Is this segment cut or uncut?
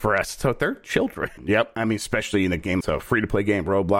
cut